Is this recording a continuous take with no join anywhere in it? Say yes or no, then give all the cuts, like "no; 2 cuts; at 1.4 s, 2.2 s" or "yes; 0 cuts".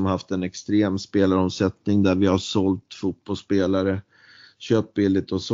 yes; 0 cuts